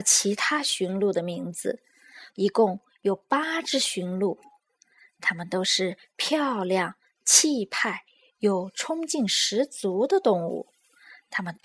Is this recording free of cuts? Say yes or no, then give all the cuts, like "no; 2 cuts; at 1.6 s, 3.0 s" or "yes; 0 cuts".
no; 1 cut; at 2.3 s